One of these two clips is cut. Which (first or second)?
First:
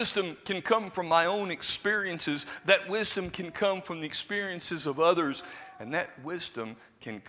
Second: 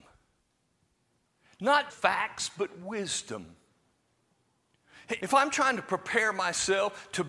second